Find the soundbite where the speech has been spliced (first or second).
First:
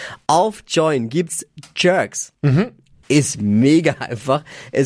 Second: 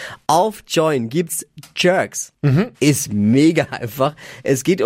second